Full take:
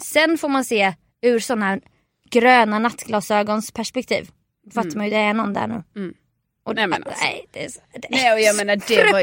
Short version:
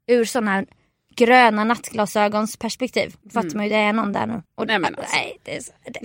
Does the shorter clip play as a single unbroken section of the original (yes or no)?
no